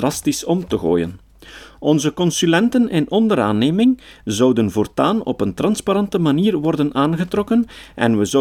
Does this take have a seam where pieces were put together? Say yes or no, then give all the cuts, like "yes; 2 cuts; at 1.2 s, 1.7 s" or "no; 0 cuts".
no; 0 cuts